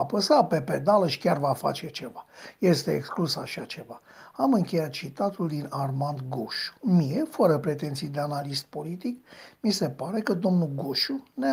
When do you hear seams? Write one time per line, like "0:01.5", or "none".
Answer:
0:06.8

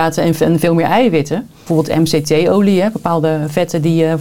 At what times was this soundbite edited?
0:01.7

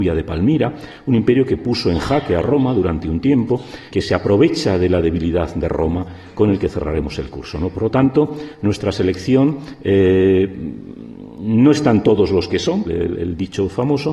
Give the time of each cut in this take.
0:03.9
0:12.8

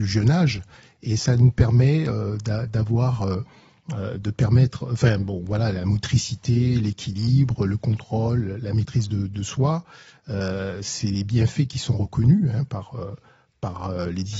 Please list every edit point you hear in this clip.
none

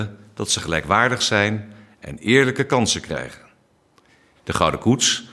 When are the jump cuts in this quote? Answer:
0:04.4

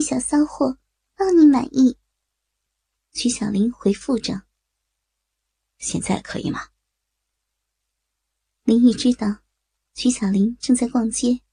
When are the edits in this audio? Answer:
none

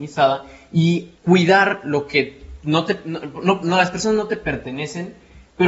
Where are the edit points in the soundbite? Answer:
0:01.2

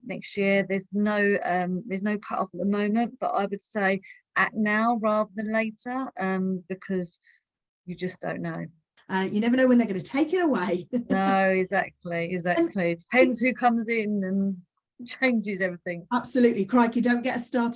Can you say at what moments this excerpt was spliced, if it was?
0:09.0

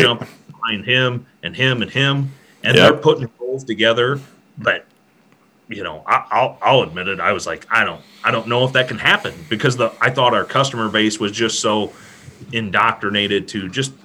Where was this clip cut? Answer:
none

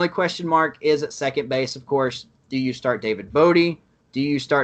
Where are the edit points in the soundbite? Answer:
0:02.4

